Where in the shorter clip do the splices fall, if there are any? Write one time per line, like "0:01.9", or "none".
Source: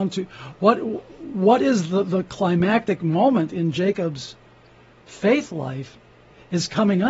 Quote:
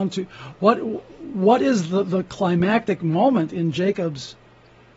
none